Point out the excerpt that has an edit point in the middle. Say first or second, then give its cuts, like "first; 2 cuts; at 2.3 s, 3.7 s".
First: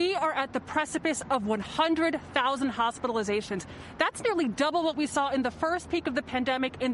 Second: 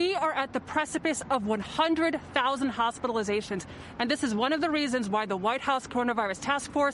second; 1 cut; at 4.0 s